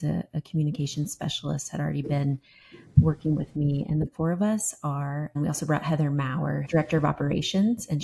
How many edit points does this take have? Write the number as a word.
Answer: two